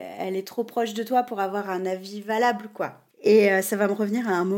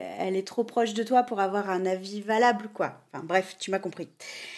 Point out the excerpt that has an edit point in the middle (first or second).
first